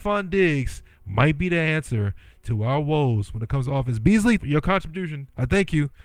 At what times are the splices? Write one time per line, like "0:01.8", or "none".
0:04.4